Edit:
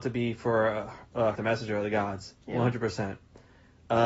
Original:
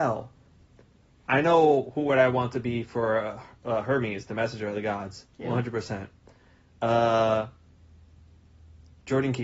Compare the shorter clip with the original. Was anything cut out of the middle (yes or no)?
yes